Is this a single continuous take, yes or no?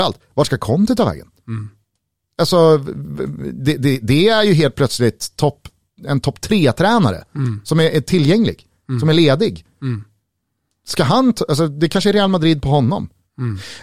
yes